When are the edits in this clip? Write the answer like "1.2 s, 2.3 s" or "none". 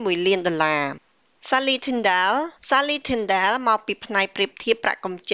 2.6 s